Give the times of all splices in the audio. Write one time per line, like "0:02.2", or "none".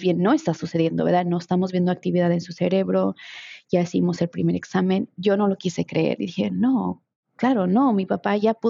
none